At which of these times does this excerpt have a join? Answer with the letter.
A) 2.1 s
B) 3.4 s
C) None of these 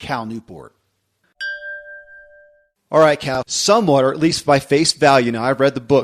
B